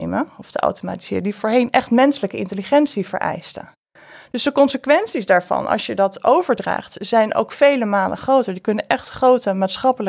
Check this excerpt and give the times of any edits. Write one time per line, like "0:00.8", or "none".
none